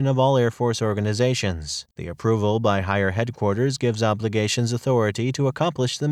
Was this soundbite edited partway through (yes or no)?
yes